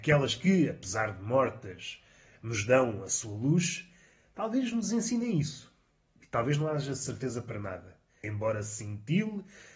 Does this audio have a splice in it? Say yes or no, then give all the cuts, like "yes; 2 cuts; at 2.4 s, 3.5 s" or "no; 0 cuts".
no; 0 cuts